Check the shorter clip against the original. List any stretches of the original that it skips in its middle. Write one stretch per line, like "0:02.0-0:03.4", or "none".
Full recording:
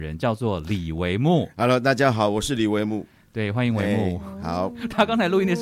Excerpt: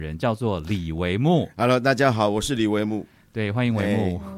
none